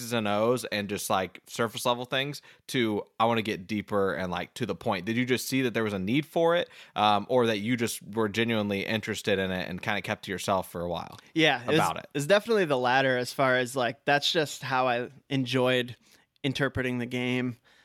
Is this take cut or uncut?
uncut